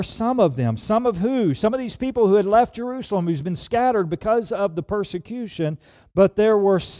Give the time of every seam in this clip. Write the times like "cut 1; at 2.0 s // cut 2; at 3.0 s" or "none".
none